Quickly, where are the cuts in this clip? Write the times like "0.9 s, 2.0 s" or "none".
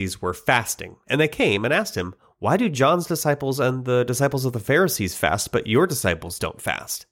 none